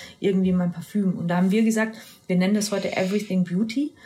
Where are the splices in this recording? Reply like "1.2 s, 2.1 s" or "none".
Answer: none